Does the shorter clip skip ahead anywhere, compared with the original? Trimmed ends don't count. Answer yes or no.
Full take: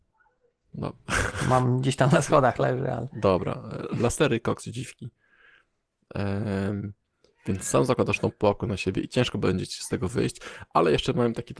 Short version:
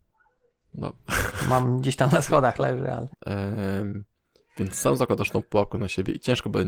yes